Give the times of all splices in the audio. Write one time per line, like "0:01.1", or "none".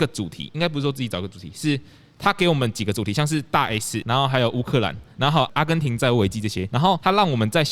none